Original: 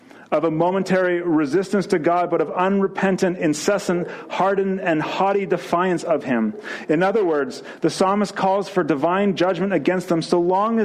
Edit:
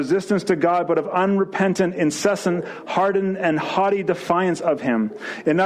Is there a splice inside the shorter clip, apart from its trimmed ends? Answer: no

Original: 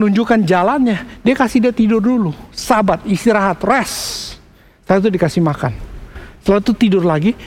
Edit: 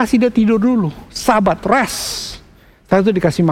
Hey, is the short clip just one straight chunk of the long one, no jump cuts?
no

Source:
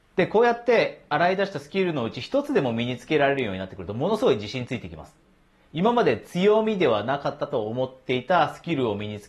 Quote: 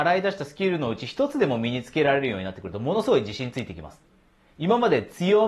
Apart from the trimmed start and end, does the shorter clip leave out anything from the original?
no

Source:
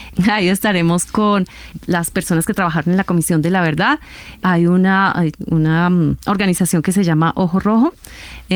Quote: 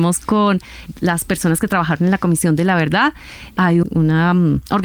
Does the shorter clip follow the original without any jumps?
no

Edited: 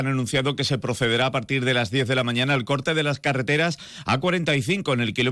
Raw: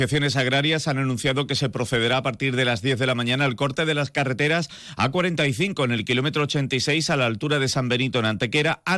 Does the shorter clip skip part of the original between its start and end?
no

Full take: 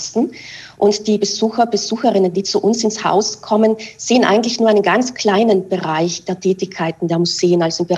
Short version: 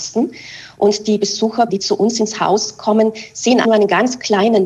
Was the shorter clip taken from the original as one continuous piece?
no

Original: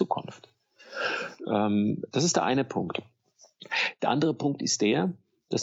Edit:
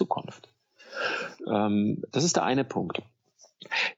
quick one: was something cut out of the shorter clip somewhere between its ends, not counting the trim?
no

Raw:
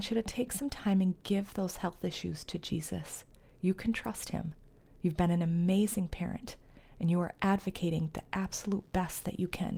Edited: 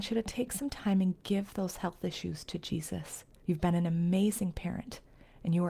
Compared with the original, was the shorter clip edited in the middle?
yes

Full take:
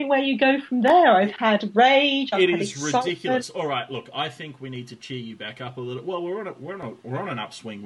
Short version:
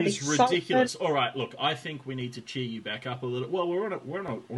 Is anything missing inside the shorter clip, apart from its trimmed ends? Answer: no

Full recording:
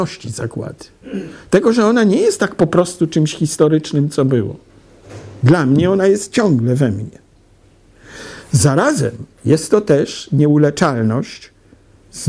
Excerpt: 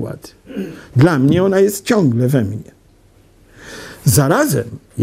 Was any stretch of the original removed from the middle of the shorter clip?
yes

